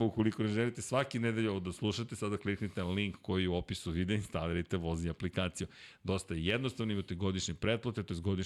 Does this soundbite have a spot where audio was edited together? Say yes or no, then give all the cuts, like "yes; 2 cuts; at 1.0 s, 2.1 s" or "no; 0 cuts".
no; 0 cuts